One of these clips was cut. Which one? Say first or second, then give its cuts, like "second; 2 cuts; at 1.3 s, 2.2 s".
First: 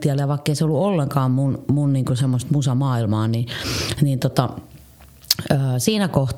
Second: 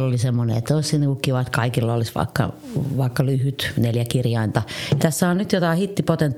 second; 1 cut; at 5.0 s